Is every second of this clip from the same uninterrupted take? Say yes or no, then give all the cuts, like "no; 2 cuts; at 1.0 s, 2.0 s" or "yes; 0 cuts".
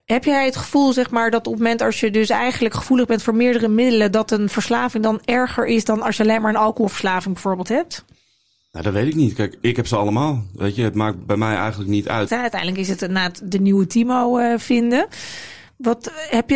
no; 2 cuts; at 9.6 s, 12.3 s